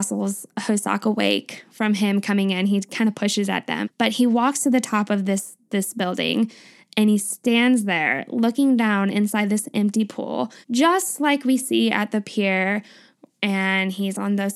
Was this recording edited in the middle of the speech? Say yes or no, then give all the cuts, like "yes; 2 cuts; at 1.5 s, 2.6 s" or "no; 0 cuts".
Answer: yes; 2 cuts; at 3.8 s, 10.6 s